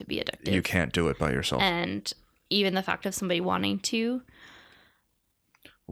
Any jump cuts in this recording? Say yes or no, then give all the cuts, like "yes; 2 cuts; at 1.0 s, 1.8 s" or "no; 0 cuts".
no; 0 cuts